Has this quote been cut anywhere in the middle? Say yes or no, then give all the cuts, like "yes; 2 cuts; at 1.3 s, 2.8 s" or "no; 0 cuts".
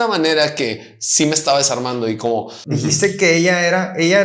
no; 0 cuts